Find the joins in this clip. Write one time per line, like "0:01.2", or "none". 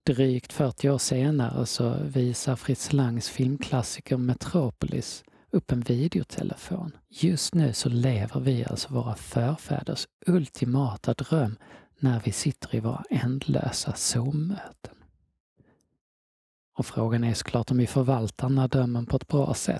0:07.1